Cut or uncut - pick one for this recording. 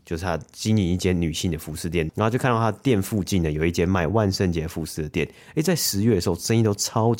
cut